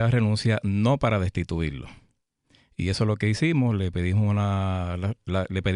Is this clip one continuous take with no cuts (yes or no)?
yes